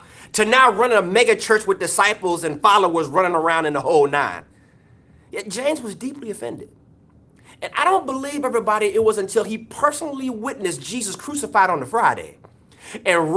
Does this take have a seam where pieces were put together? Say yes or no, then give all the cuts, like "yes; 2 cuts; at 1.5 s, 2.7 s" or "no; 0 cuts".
no; 0 cuts